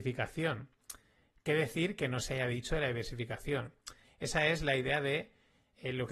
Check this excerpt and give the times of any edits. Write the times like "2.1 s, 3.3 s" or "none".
4.0 s

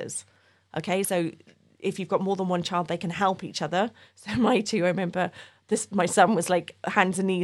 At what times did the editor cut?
none

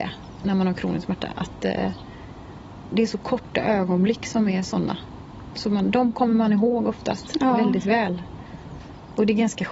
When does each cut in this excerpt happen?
2.9 s

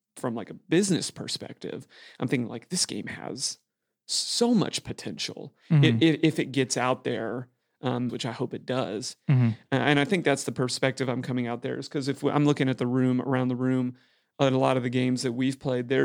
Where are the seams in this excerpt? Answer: 8.1 s

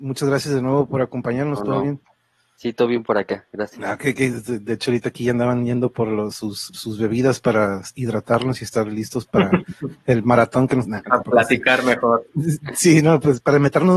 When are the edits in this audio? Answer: none

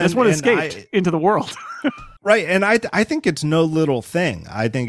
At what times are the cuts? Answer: 2.2 s

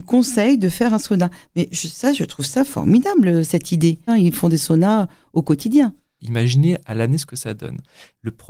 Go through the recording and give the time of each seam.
4.1 s, 6.2 s

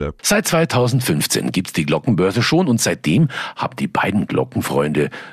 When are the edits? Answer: none

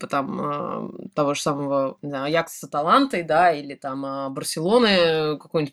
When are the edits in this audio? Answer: none

